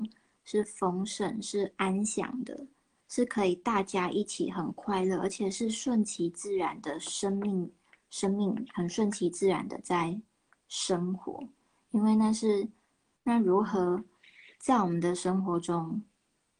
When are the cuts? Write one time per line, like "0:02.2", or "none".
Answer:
0:13.2